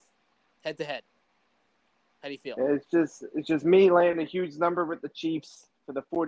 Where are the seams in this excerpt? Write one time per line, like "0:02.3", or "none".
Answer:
none